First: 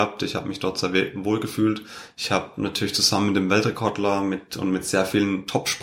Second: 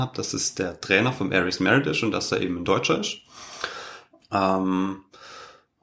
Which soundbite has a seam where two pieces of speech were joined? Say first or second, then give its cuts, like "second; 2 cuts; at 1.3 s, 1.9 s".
second; 1 cut; at 4.2 s